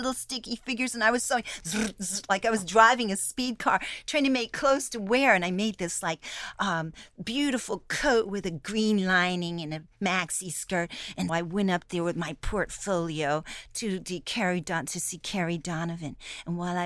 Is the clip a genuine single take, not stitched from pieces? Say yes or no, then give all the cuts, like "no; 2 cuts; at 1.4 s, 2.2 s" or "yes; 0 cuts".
no; 1 cut; at 11.3 s